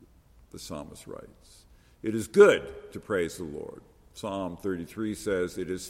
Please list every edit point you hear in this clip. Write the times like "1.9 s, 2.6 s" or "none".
none